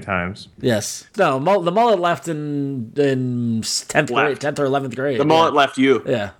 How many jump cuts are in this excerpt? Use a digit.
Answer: 1